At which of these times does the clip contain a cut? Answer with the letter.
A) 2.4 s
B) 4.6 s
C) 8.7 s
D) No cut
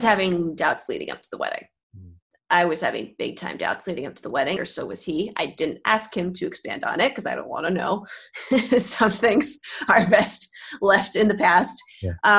B